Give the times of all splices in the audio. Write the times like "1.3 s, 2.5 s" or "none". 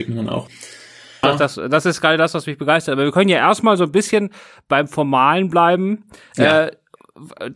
1.2 s